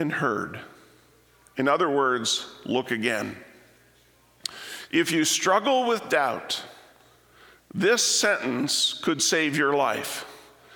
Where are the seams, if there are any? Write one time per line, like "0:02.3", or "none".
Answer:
0:04.9